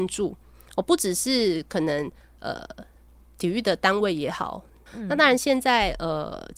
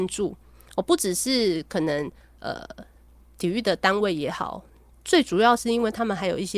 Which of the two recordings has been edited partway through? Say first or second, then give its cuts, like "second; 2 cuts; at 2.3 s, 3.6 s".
first; 1 cut; at 4.9 s